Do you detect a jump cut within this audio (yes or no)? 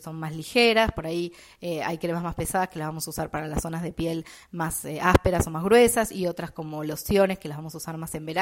no